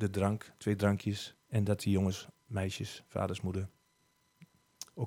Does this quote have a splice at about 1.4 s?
yes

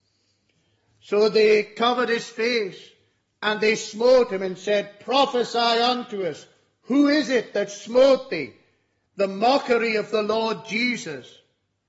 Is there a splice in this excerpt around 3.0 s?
no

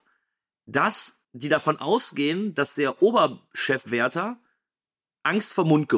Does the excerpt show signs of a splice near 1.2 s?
yes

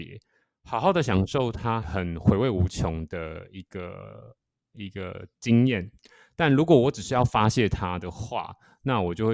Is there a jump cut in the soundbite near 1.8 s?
yes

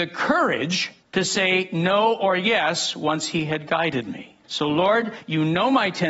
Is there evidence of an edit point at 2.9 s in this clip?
no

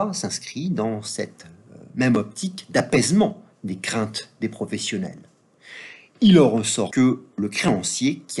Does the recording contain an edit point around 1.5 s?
no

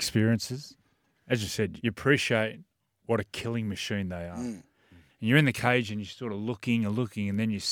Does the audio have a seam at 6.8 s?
no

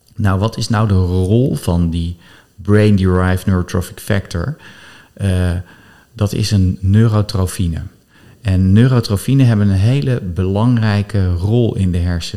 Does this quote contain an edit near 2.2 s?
no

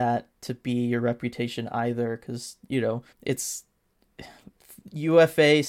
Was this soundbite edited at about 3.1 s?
yes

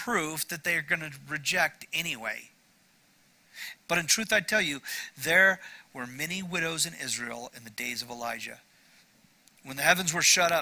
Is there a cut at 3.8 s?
yes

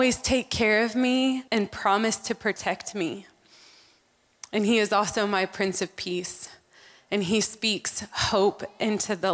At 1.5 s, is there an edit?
yes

